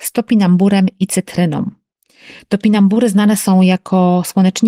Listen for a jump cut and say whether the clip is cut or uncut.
uncut